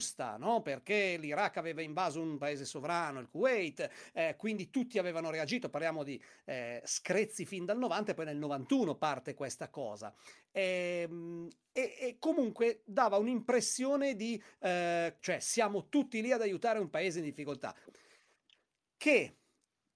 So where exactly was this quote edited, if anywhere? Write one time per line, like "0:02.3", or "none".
0:15.2
0:17.9

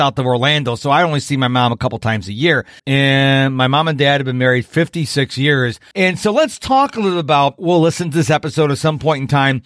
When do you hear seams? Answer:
0:02.8
0:05.9
0:07.6

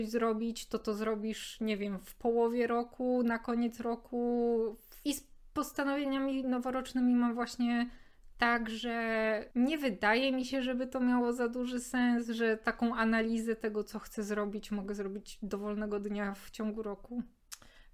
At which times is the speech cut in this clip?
0:05.0

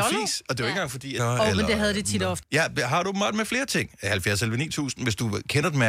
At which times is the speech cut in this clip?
0:01.2
0:02.4

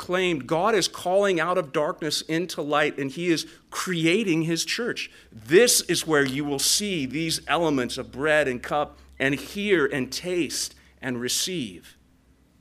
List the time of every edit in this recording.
0:05.2

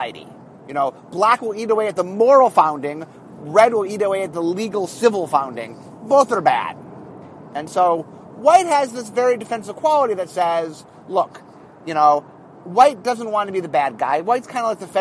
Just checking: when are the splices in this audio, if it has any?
none

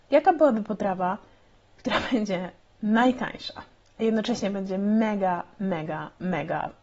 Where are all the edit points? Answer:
none

